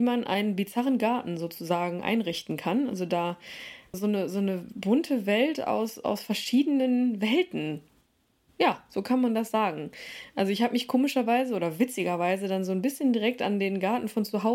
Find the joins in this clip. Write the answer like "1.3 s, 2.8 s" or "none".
3.9 s